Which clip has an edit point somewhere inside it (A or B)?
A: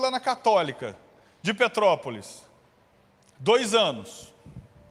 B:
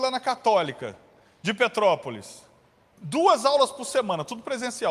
B